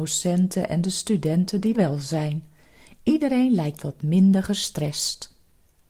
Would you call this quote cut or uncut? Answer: cut